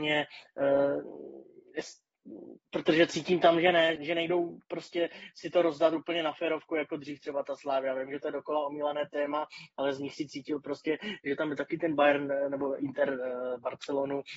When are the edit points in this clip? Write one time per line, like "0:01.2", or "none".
0:04.0